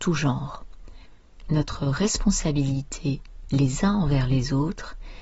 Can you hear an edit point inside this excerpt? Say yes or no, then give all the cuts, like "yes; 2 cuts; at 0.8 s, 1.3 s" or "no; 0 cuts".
yes; 1 cut; at 1.5 s